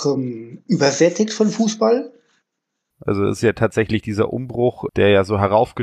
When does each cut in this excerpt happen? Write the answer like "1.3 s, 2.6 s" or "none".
2.9 s, 4.9 s